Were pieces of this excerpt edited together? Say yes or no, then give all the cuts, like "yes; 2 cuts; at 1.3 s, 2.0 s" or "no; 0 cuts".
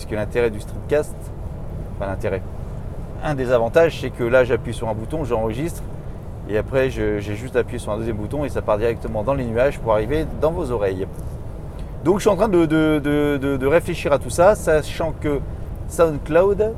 no; 0 cuts